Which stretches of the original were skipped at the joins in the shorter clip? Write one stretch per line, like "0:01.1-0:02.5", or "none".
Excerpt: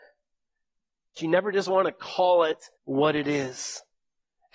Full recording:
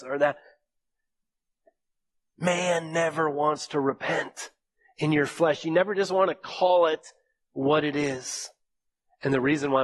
0:01.6-0:05.6
0:07.2-0:07.4